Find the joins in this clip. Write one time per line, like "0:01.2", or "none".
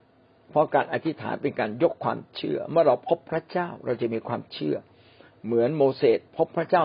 none